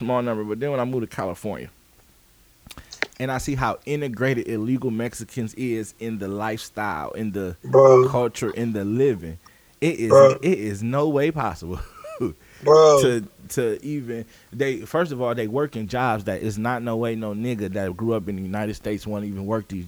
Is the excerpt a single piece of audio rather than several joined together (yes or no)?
yes